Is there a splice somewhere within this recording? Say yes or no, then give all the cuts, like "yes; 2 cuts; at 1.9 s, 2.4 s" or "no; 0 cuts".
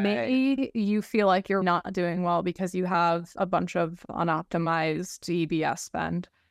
yes; 1 cut; at 1.6 s